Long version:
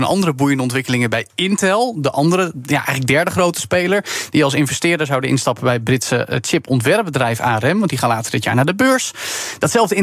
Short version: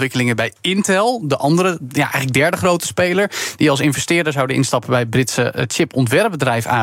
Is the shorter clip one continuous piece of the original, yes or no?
yes